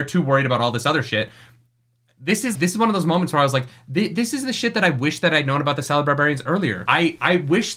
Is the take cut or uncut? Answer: cut